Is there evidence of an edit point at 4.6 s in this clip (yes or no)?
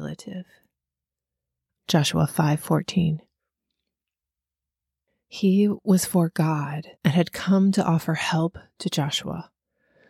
no